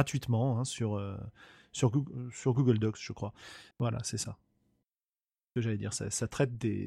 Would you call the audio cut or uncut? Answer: cut